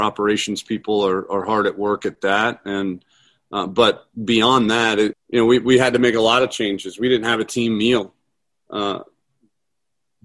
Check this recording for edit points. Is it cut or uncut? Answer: cut